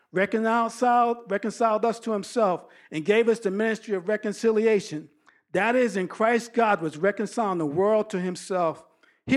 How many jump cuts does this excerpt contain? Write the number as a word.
zero